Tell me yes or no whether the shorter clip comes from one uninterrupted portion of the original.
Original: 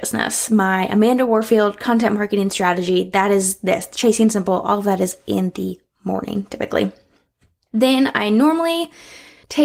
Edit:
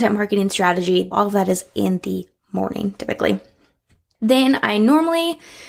no